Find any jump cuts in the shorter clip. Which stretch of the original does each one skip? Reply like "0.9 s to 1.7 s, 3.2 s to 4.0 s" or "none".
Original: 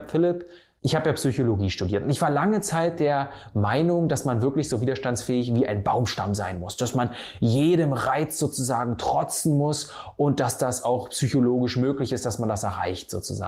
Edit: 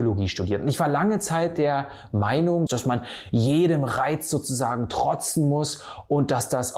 4.1 s to 6.8 s